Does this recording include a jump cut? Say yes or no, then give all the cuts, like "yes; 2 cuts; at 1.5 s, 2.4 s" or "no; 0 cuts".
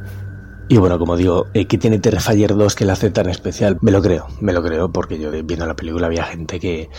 yes; 2 cuts; at 3.8 s, 5.3 s